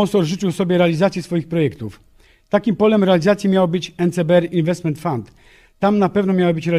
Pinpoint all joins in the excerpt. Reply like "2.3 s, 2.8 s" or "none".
none